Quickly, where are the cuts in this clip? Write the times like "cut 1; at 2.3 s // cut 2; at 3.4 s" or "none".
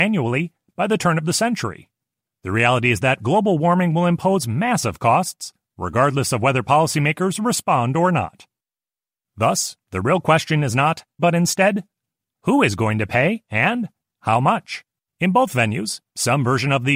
cut 1; at 2.3 s // cut 2; at 11.2 s // cut 3; at 15.0 s

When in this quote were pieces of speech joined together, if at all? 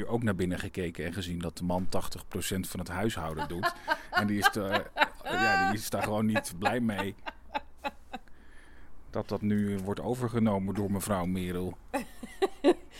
none

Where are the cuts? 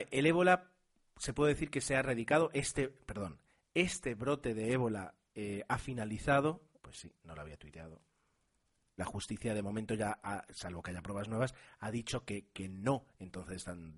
cut 1; at 6.8 s // cut 2; at 9.0 s

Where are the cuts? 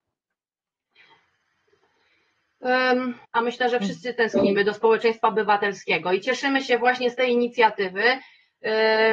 cut 1; at 3.2 s

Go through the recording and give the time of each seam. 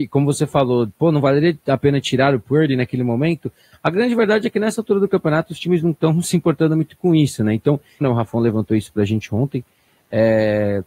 cut 1; at 8.0 s

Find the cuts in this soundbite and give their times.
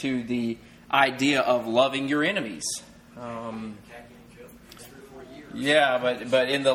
cut 1; at 4.8 s

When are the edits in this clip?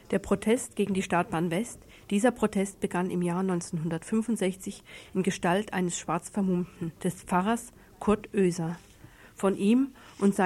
cut 1; at 2.0 s // cut 2; at 7.0 s

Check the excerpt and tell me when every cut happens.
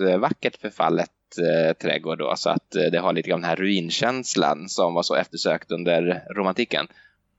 none

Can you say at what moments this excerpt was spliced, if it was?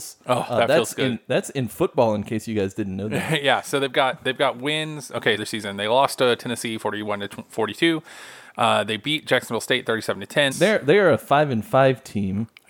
cut 1; at 5.4 s // cut 2; at 10.5 s

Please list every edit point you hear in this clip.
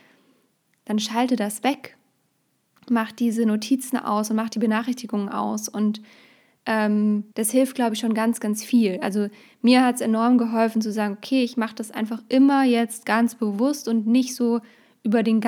cut 1; at 2.8 s // cut 2; at 7.3 s

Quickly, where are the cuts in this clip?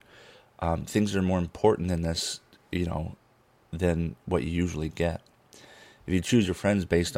none

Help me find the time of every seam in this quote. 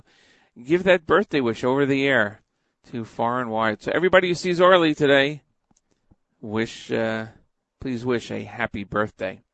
none

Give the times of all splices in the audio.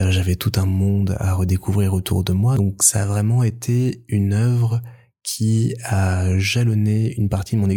none

